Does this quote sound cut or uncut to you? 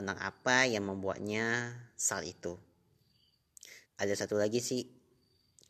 cut